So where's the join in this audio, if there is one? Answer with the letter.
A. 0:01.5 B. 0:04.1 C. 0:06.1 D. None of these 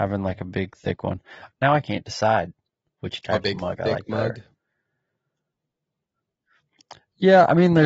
A